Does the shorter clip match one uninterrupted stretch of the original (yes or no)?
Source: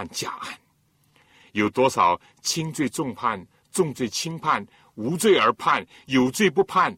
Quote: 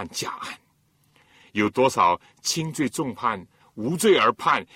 no